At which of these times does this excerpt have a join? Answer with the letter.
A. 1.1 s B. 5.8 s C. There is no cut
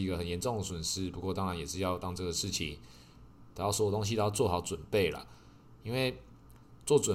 C